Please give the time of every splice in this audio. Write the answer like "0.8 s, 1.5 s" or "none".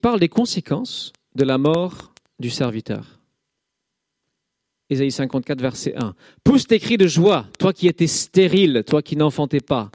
none